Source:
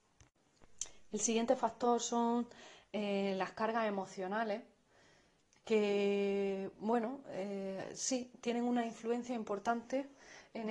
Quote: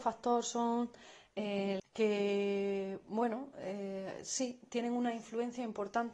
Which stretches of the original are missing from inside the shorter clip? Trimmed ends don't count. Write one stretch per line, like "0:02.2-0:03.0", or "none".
0:03.4-0:05.5